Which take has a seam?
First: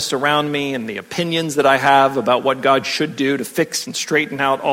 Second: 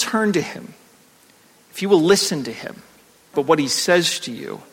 second; 1 cut; at 3.3 s

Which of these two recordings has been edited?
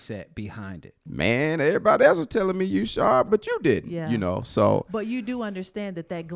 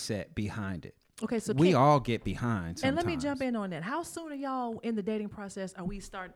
first; 2 cuts; at 1.1 s, 3.3 s

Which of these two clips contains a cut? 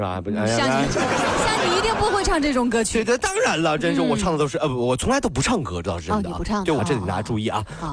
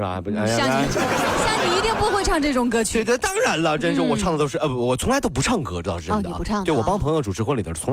first; 1 cut; at 6.8 s

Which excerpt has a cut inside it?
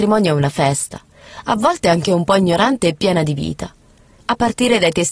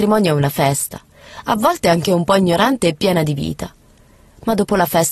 first; 1 cut; at 4.2 s

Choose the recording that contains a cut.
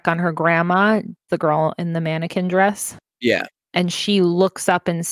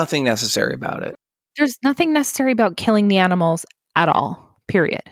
first; 1 cut; at 1.3 s

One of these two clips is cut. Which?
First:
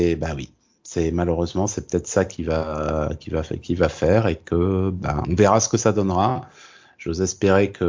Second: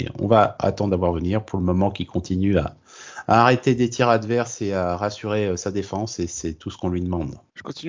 first; 1 cut; at 5.2 s

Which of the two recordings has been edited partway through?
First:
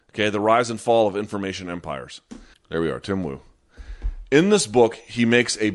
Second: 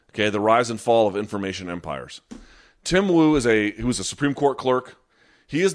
first; 1 cut; at 2.5 s

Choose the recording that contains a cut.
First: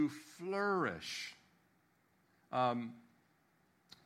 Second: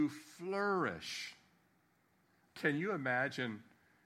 second; 1 cut; at 2.5 s

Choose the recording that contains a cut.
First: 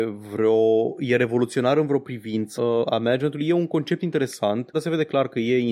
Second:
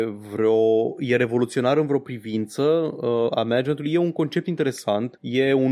first; 2 cuts; at 2.6 s, 4.7 s

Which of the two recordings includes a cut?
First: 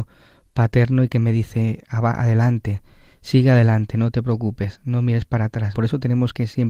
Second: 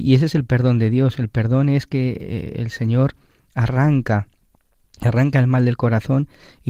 first; 1 cut; at 5.7 s

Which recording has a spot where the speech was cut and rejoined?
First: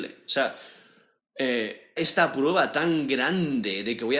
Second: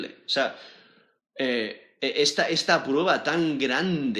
first; 1 cut; at 2.0 s

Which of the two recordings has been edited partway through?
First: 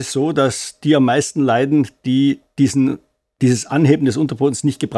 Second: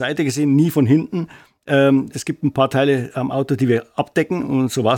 second; 1 cut; at 2.1 s

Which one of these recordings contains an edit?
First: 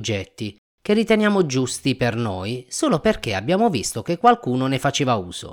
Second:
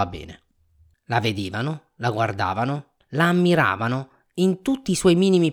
second; 2 cuts; at 0.9 s, 3.0 s

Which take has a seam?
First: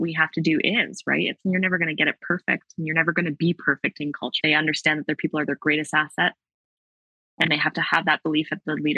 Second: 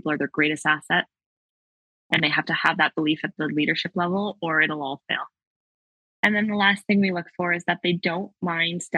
first; 1 cut; at 4.4 s

